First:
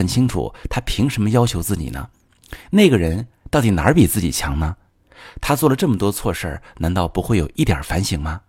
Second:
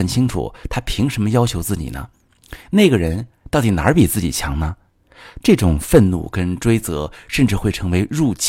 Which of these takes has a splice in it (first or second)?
second